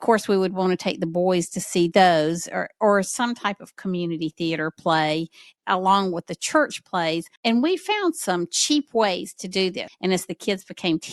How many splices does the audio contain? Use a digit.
2